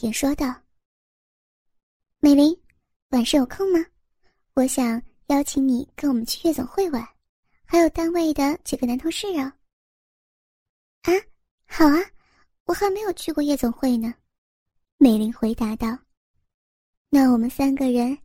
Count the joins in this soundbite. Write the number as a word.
zero